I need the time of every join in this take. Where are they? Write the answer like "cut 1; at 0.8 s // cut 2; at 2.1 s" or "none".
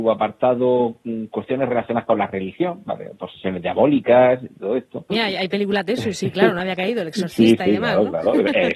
cut 1; at 5.1 s